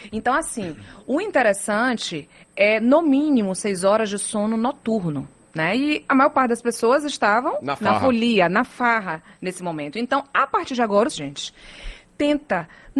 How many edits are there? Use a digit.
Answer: 1